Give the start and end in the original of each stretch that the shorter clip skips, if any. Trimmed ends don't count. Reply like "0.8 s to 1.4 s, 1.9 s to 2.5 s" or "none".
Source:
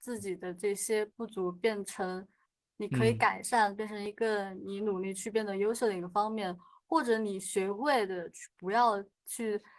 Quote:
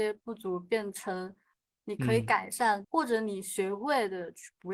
3.8 s to 6.8 s

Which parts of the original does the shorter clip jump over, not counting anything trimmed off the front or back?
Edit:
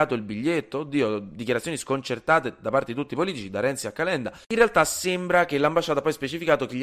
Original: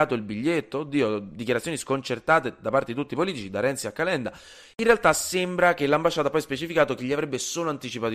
4.4 s to 4.7 s

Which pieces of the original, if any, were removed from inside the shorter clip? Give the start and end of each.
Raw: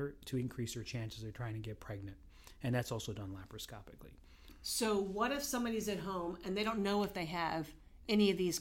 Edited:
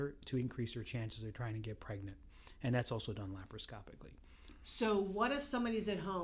none

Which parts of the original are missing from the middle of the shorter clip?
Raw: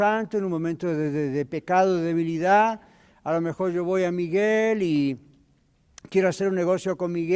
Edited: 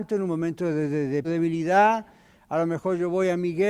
1.5 s to 2.0 s

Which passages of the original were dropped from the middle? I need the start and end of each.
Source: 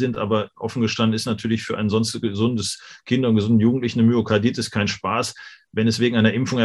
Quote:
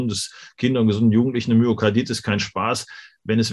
none

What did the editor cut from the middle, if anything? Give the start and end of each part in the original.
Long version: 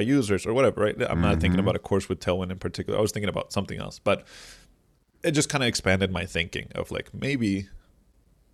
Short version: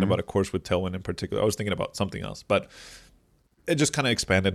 none

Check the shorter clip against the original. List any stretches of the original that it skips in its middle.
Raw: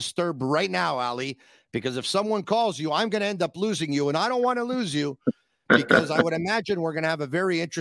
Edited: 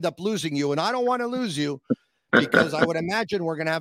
none

